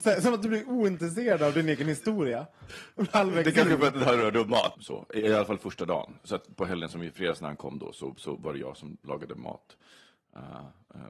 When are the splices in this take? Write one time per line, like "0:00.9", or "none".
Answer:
0:04.7